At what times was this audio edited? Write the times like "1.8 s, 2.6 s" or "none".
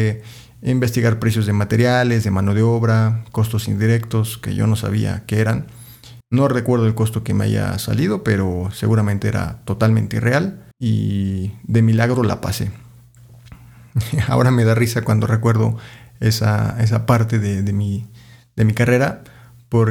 6.2 s, 10.7 s